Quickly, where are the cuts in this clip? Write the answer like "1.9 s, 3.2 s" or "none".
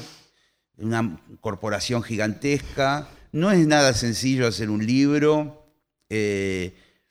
none